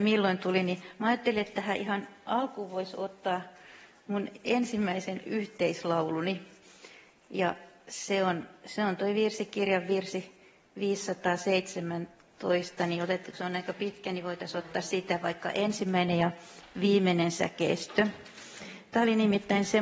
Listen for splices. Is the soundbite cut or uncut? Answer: uncut